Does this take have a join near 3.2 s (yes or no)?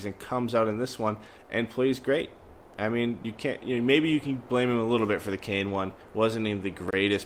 yes